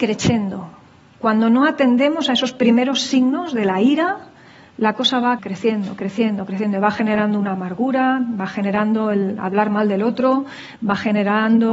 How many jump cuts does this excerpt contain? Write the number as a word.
one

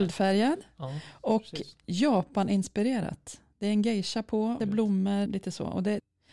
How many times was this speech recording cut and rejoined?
one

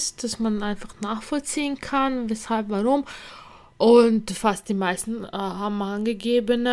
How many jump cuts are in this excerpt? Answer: zero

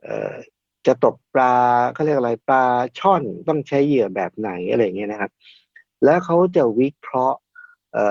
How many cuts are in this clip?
zero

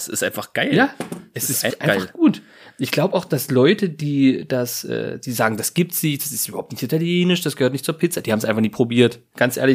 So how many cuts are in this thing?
one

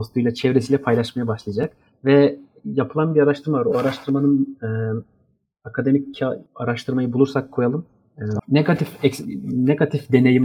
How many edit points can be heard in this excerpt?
two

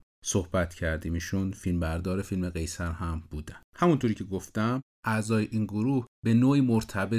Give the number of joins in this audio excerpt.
one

